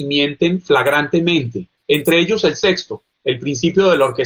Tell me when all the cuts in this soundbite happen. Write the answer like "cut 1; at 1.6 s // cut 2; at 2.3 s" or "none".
cut 1; at 1.8 s